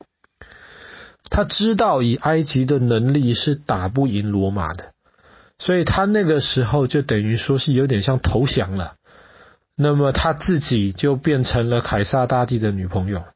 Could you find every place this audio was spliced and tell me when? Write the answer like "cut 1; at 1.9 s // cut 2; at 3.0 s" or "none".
cut 1; at 1.2 s